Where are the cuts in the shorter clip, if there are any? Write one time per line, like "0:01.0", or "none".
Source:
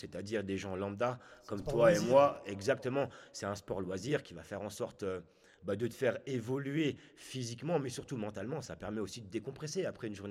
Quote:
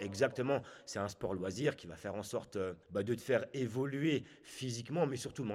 0:02.8

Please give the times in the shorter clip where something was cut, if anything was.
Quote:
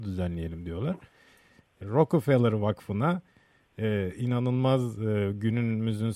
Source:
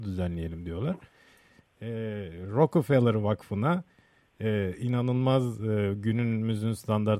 0:01.8

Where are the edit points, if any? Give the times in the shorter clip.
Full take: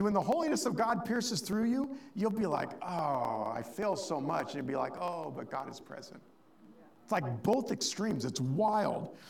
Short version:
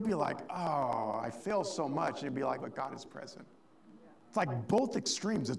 0:02.6

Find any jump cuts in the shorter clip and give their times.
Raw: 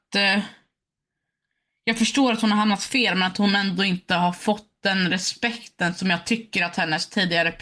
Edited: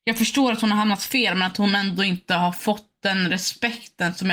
none

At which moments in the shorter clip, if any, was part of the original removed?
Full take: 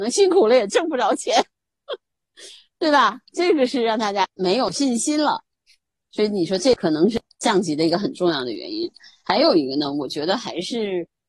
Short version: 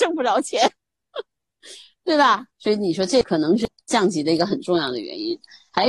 0:02.5

